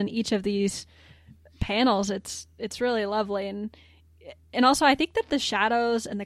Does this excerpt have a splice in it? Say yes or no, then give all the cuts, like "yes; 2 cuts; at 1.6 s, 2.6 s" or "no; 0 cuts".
no; 0 cuts